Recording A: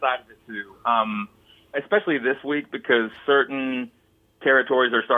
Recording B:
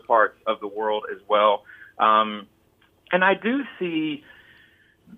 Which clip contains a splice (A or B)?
A